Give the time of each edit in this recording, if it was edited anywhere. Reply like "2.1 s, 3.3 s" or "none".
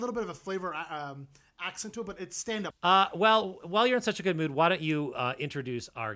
2.7 s